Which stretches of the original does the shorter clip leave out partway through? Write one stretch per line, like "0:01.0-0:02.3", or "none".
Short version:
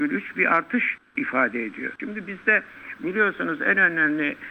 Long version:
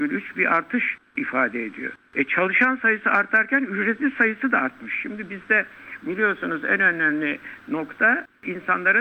0:02.0-0:05.0